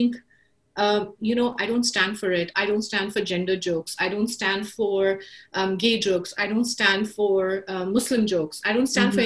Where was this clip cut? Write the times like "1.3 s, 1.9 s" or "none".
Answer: 1.2 s